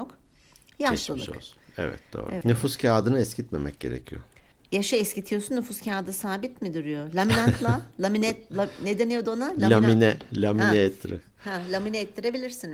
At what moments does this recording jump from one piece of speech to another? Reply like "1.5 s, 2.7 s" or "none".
2.4 s